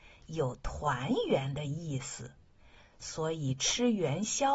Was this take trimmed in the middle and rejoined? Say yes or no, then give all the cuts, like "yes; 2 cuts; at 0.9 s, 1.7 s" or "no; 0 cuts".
no; 0 cuts